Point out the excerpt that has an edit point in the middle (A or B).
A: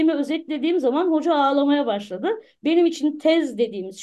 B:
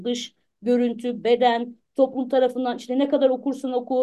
A